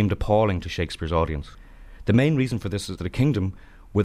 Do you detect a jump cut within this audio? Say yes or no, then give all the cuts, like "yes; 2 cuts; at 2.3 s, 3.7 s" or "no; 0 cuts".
yes; 1 cut; at 3.0 s